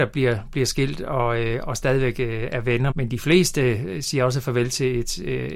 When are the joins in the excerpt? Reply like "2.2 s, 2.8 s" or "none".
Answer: 2.9 s